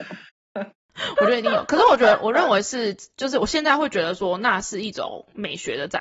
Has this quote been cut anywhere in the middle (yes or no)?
no